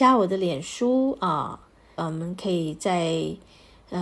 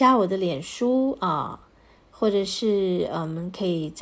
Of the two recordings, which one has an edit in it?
first; 1 cut; at 2.0 s

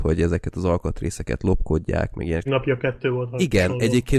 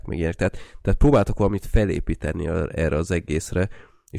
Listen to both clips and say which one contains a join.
first; 1 cut; at 2.5 s

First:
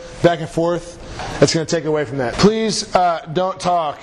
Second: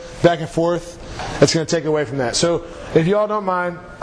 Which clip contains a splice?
first; 1 cut; at 2.3 s

